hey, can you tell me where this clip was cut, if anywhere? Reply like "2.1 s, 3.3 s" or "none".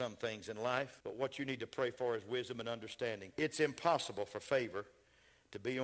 1.0 s, 3.3 s